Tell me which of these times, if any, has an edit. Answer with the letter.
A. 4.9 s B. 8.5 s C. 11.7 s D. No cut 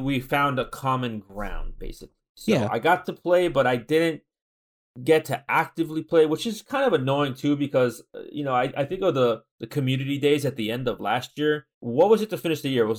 C